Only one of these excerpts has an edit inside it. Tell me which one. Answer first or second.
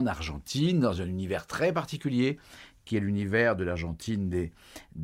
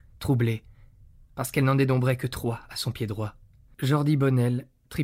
second